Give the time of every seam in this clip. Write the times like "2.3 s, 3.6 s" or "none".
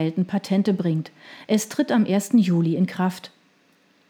none